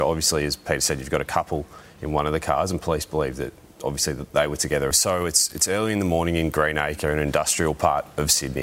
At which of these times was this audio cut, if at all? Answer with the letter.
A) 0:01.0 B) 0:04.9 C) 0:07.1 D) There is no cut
B